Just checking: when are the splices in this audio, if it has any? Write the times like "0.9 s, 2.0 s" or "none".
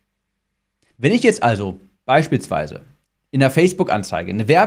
0.9 s